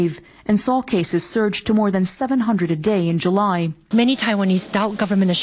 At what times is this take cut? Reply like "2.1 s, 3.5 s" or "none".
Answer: 3.9 s